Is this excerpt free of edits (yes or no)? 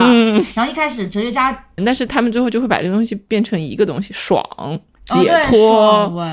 no